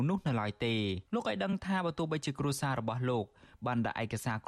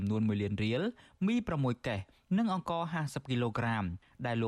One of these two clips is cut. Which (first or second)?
first